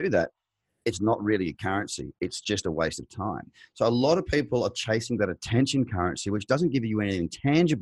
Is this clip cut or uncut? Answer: uncut